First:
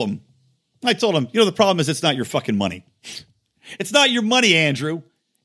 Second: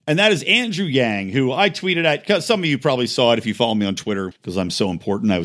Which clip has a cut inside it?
second; 1 cut; at 4.3 s

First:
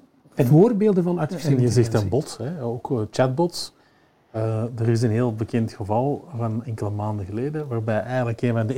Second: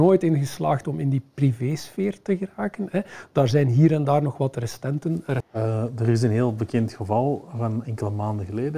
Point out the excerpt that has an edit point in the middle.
second; 1 cut; at 5.4 s

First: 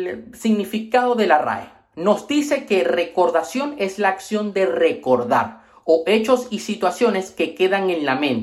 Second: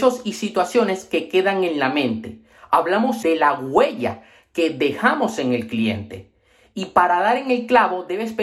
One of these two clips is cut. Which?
second; 1 cut; at 3.2 s

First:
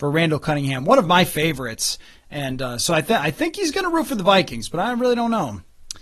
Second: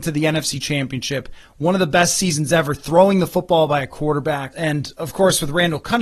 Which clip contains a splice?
second; 1 cut; at 4.5 s

